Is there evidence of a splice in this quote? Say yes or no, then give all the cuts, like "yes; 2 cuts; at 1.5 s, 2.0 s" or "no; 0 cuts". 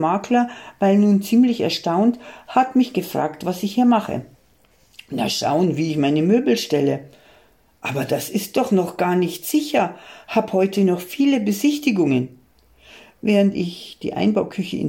no; 0 cuts